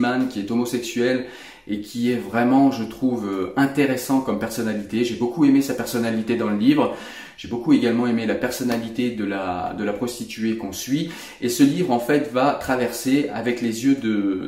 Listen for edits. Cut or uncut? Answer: uncut